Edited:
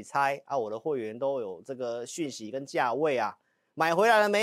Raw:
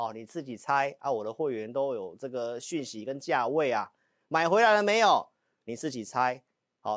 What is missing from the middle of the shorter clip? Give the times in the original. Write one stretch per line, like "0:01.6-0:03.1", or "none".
none